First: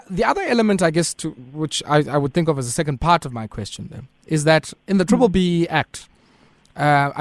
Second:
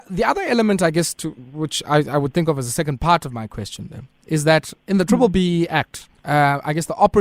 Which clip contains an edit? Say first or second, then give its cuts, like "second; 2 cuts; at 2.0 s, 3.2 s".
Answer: second; 1 cut; at 6.2 s